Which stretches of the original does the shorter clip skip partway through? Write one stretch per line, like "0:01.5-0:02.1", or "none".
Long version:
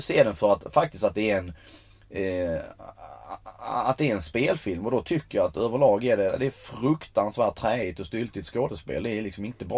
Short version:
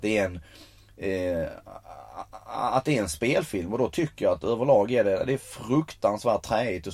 none